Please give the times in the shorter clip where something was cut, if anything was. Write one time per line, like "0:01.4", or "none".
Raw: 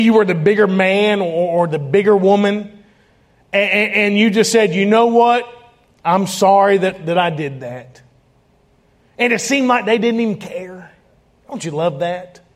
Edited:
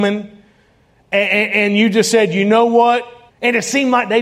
0:03.3

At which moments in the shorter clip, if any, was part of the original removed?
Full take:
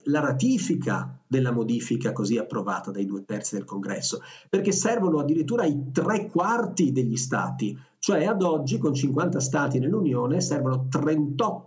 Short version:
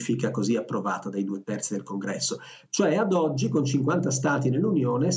0:02.7

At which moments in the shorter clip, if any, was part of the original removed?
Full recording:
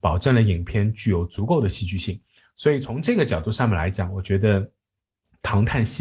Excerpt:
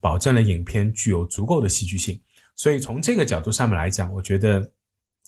none

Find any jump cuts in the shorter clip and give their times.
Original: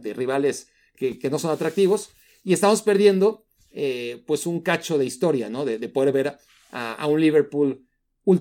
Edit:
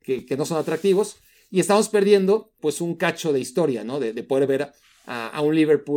0:02.6

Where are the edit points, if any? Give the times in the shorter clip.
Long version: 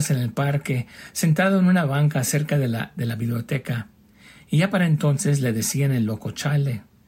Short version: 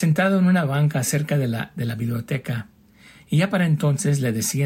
none

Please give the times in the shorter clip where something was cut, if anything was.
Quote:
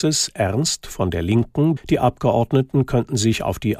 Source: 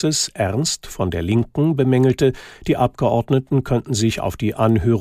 0:01.8

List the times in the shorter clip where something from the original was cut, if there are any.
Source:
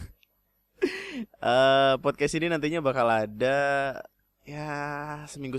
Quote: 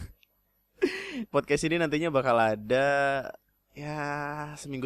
0:01.3

